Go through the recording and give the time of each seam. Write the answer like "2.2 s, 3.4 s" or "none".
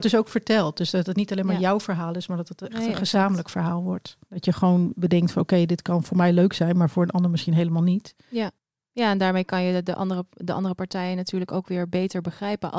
4.2 s